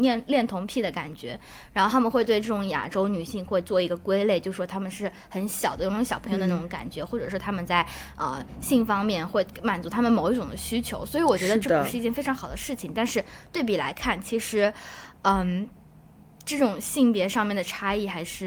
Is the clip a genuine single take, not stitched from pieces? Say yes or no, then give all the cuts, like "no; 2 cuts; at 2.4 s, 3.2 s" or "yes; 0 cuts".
yes; 0 cuts